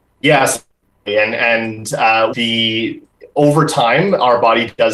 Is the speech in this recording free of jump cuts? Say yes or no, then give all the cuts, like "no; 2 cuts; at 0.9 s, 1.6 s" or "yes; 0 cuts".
no; 1 cut; at 2.3 s